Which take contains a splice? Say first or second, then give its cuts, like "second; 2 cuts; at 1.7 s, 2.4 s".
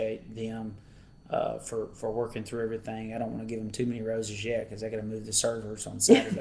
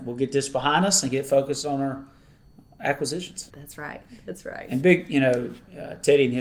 second; 1 cut; at 3.5 s